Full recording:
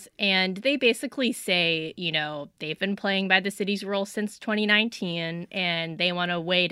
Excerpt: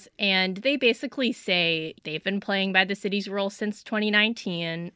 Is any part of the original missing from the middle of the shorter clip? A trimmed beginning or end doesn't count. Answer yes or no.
yes